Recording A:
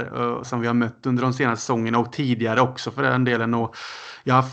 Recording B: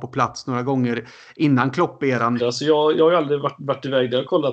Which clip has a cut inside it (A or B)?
B